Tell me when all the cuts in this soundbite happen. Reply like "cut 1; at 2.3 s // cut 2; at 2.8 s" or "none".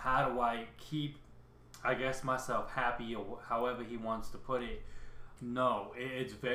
cut 1; at 5.4 s